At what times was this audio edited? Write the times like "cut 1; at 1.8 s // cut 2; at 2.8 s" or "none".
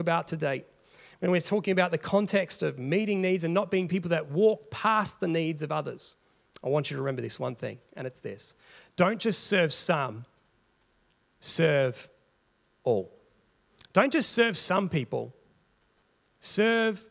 none